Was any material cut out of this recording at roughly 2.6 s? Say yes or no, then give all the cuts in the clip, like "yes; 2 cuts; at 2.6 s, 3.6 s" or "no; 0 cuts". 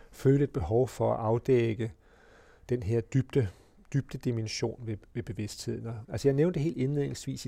no; 1 cut; at 6.0 s